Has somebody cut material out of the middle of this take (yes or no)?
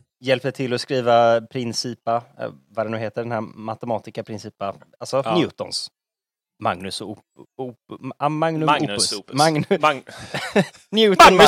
no